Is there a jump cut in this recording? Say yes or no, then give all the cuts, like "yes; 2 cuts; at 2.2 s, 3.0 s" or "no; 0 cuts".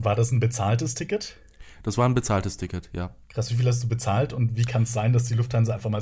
yes; 1 cut; at 3.2 s